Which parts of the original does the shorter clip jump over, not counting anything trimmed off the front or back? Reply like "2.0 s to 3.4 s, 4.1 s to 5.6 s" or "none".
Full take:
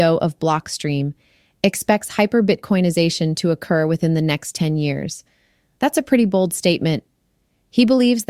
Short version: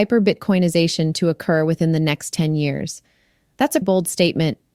6.0 s to 6.3 s